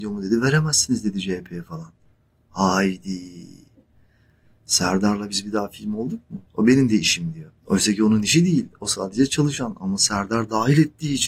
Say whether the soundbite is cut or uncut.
cut